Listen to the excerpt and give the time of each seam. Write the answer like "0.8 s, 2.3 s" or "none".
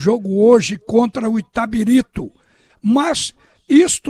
2.7 s